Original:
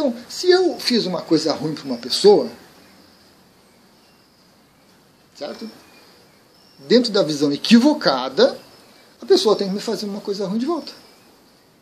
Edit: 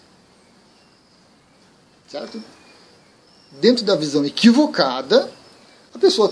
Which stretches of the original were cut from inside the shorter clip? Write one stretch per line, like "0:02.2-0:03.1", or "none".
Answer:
none